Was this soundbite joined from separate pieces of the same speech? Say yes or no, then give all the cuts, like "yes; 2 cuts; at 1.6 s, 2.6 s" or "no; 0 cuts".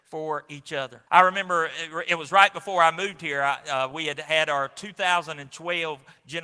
yes; 1 cut; at 1.1 s